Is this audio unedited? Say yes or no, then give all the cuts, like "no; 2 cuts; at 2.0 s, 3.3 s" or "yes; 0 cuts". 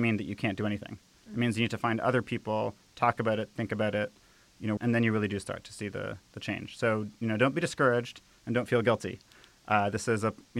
no; 1 cut; at 4.8 s